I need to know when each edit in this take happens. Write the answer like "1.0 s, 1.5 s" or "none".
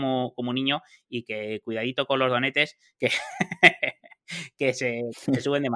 none